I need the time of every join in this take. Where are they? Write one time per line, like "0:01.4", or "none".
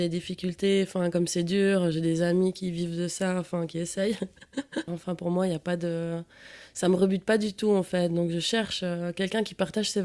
0:04.9